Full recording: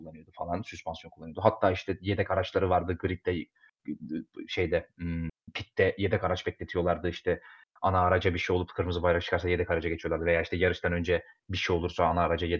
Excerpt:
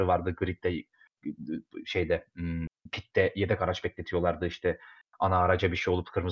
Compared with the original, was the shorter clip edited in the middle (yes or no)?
no